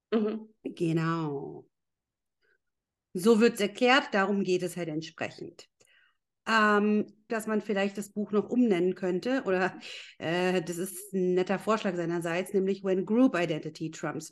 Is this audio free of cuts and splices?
no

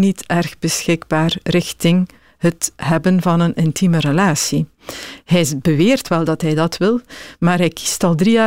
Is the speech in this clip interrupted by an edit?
no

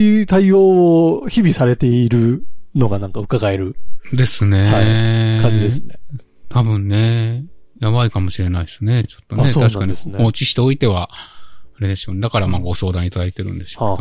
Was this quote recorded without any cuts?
yes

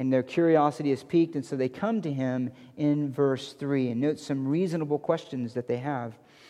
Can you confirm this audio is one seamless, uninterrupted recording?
yes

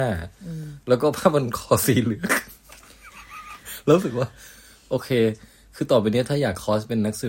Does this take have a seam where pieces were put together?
no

